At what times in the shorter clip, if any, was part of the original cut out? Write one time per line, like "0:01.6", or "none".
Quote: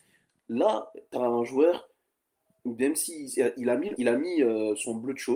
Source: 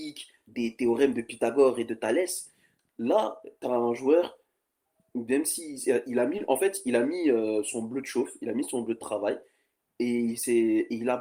0:04.0